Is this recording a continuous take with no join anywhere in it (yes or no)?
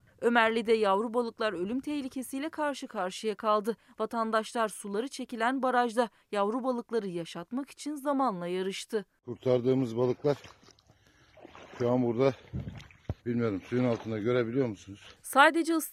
no